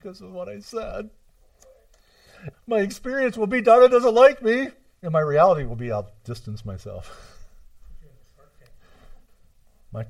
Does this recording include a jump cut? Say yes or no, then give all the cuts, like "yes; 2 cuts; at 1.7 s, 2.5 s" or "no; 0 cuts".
yes; 1 cut; at 2.5 s